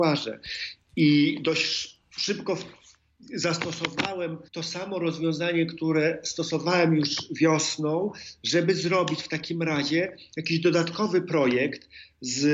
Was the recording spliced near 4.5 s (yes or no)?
yes